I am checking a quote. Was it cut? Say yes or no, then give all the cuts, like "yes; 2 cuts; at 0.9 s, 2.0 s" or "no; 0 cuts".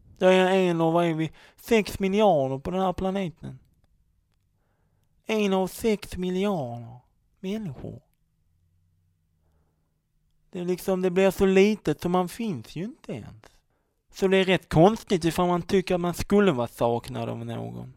no; 0 cuts